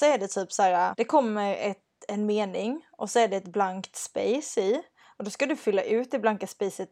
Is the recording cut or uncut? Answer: cut